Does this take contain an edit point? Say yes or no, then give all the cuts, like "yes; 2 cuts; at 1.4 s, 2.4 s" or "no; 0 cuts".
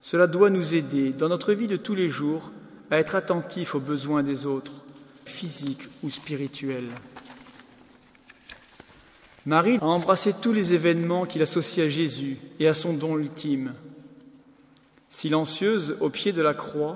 yes; 2 cuts; at 5.3 s, 9.8 s